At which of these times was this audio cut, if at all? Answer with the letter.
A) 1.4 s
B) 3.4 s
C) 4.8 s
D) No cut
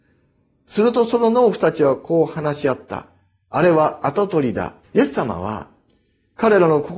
C